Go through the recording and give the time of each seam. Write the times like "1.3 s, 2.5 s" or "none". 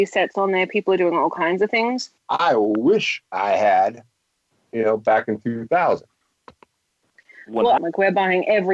2.2 s, 7.8 s